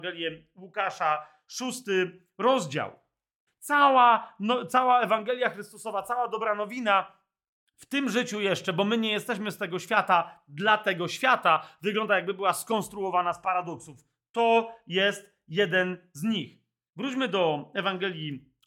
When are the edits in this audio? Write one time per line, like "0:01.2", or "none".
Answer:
0:03.5